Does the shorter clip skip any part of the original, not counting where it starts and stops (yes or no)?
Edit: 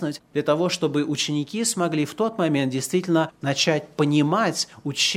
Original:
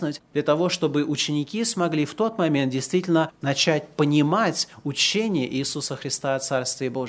no